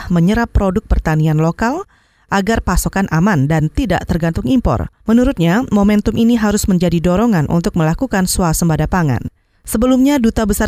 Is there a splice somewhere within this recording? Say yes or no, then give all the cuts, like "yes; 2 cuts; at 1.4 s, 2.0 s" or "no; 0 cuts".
yes; 1 cut; at 5.0 s